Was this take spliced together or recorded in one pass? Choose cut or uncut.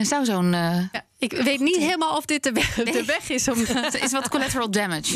cut